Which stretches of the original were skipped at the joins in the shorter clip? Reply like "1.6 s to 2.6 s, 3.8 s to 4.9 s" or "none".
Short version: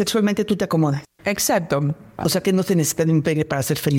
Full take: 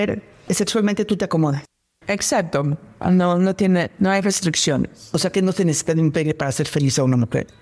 1.7 s to 1.9 s, 3.0 s to 5.1 s